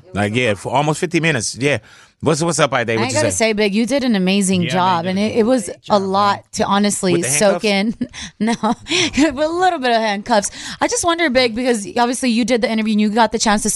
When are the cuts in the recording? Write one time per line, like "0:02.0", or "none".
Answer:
none